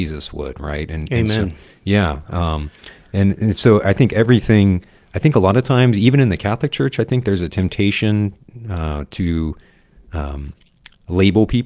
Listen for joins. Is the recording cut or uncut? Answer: uncut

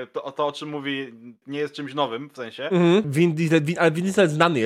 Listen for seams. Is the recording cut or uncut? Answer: cut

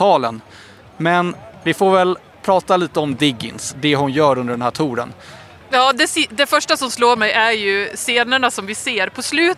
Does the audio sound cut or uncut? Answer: uncut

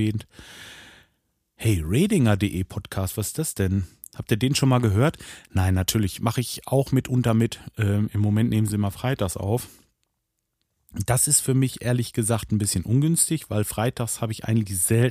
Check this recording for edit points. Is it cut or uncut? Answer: uncut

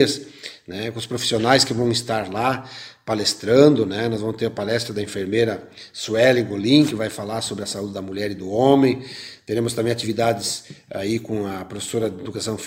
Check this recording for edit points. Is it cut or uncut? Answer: uncut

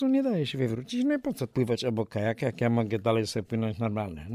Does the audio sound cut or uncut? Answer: uncut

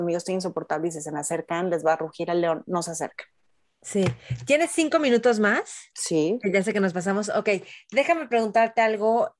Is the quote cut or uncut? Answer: uncut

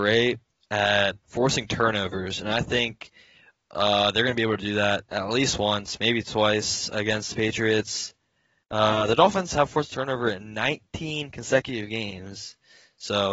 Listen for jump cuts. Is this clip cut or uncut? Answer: uncut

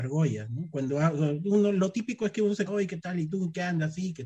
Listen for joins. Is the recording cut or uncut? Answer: cut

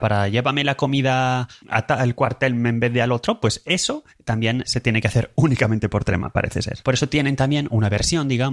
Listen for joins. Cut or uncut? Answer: cut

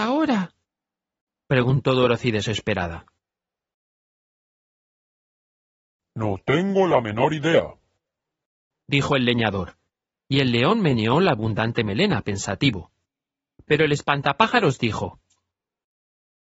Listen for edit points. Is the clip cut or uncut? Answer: uncut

